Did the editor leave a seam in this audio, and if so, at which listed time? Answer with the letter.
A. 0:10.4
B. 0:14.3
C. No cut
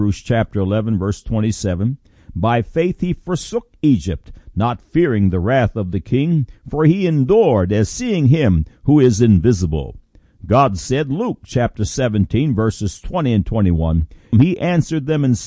B